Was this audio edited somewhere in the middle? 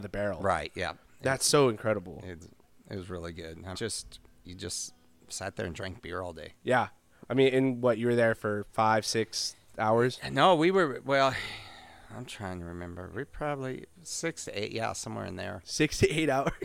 yes; 1 cut; at 3.8 s

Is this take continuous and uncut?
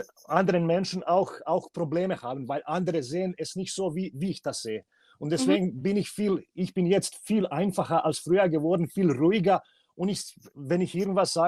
yes; 0 cuts

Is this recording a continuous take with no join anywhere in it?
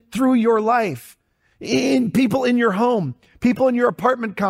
yes; 0 cuts

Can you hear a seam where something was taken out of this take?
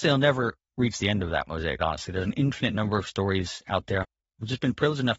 yes; 1 cut; at 1.8 s

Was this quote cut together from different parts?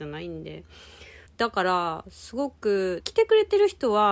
yes; 2 cuts; at 1.3 s, 3.0 s

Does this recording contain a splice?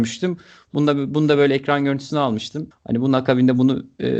yes; 1 cut; at 2.7 s

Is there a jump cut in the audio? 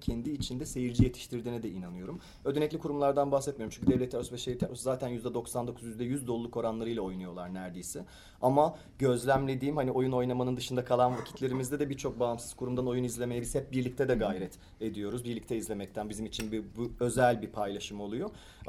no; 0 cuts

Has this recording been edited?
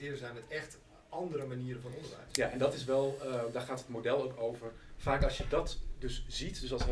no; 0 cuts

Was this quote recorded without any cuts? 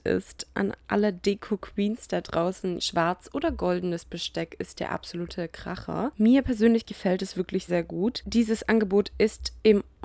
no; 2 cuts; at 2.8 s, 7.7 s

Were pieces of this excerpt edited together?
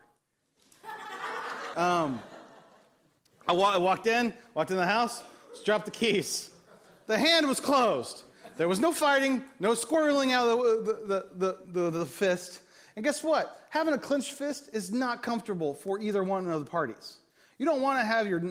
yes; 1 cut; at 1.7 s

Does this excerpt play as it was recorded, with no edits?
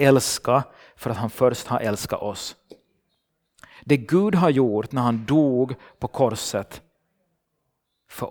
yes; 0 cuts

